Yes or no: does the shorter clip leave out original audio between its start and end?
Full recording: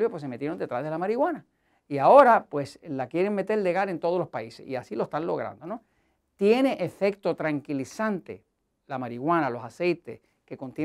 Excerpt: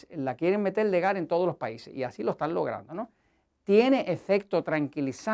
no